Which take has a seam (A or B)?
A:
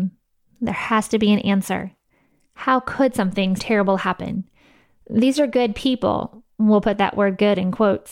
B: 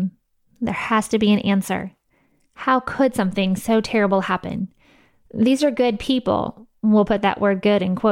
A